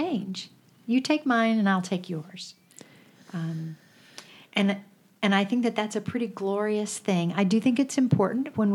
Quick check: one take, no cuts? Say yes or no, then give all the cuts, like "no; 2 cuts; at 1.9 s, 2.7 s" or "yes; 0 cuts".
yes; 0 cuts